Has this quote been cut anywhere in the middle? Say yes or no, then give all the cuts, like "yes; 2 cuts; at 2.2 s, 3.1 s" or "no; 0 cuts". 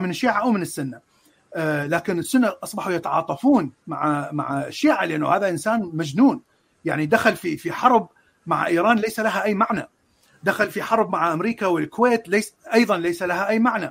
no; 0 cuts